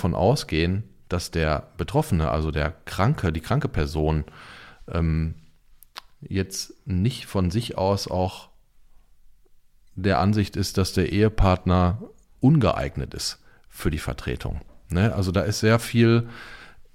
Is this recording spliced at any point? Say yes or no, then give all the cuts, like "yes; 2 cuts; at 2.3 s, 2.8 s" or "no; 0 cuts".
no; 0 cuts